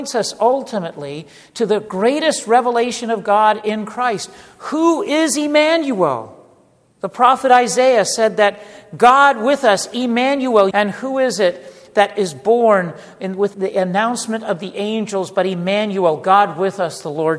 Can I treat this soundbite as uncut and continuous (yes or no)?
no